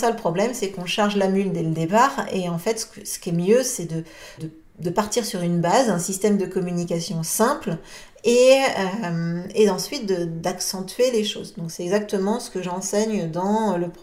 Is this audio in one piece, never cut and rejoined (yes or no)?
no